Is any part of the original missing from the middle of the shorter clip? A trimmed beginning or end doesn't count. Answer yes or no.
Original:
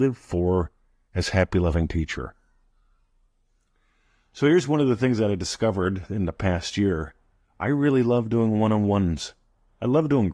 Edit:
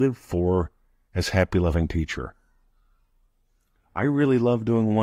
yes